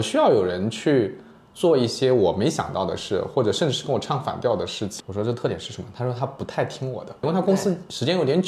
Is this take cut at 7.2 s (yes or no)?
yes